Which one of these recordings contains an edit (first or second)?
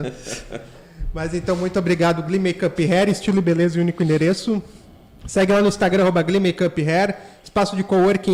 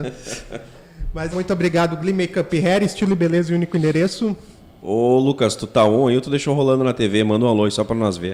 second